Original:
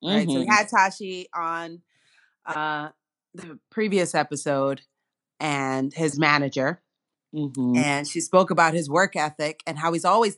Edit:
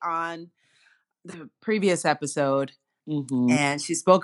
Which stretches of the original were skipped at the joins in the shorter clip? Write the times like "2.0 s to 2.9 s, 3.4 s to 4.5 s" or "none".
2.4 s to 3.2 s, 5.1 s to 7.2 s